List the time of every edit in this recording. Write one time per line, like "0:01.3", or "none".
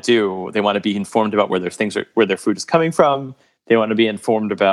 none